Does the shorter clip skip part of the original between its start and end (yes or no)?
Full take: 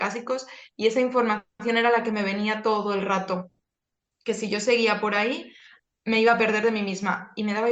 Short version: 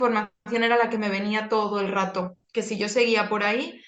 yes